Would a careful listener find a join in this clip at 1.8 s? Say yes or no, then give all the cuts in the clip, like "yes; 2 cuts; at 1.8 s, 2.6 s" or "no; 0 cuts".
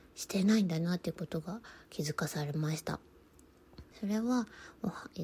yes; 2 cuts; at 1.8 s, 3.9 s